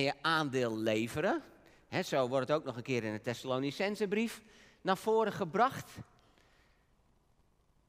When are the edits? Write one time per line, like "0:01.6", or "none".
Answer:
none